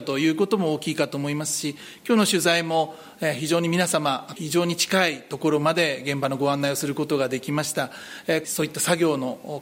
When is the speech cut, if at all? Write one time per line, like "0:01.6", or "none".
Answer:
0:04.4
0:08.4